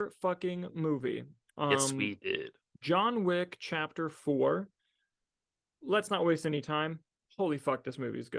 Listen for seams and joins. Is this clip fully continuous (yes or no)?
yes